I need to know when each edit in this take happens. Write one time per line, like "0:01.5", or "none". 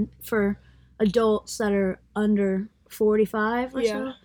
none